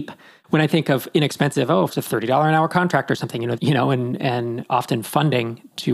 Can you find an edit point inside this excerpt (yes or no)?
yes